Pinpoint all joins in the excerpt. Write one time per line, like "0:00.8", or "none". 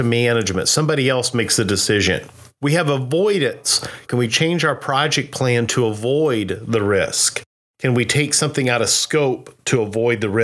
0:04.1